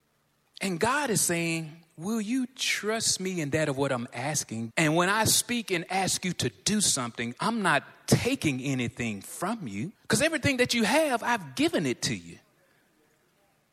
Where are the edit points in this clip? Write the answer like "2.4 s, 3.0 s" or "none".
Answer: 4.7 s, 9.9 s

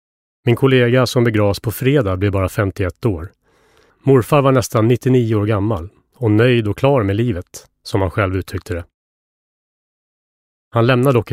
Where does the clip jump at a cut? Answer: 3.9 s

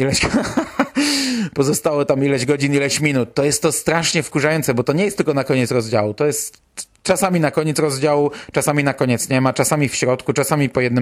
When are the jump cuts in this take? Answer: none

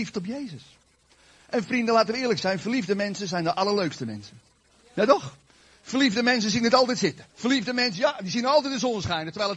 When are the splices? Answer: 7.3 s

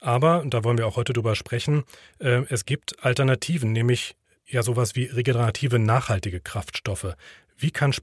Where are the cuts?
none

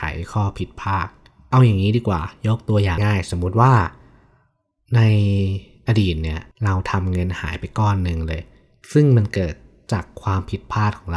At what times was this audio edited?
3.0 s, 6.5 s

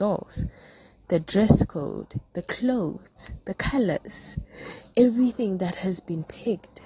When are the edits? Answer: none

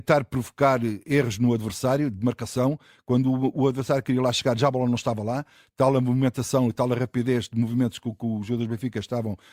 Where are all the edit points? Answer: none

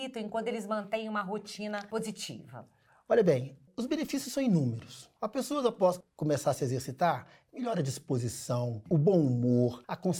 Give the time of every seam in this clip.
5.2 s, 7.5 s

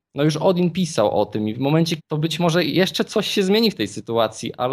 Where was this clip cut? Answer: 2.0 s

